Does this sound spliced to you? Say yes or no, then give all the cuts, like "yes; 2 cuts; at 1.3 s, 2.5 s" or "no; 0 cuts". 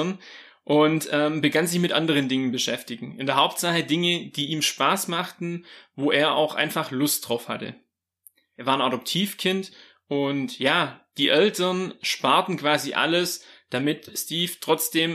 yes; 1 cut; at 8.6 s